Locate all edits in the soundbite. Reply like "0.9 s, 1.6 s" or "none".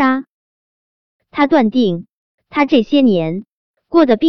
1.2 s